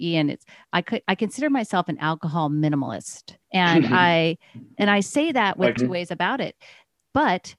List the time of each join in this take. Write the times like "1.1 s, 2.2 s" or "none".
3.4 s, 5.8 s